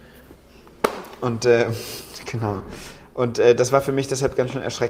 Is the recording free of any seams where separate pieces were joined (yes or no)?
yes